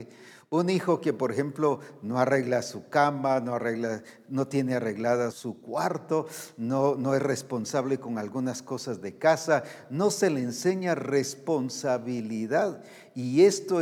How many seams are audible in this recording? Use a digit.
1